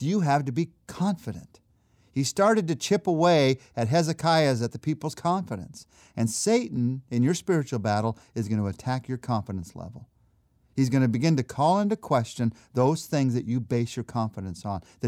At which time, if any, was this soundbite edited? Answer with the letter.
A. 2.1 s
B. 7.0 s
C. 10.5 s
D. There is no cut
D